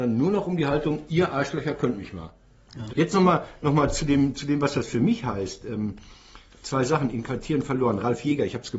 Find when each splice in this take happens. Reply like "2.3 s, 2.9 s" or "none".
2.9 s